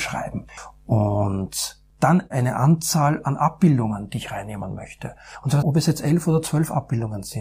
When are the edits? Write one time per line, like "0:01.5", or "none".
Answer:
0:05.6